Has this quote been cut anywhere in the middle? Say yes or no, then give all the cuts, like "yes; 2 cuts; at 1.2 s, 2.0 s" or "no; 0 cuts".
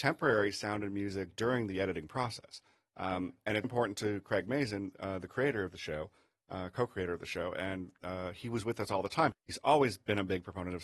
yes; 2 cuts; at 3.6 s, 9.3 s